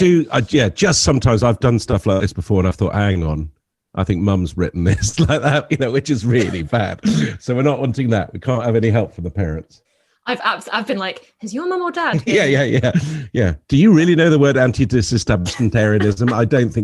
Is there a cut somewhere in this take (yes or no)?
no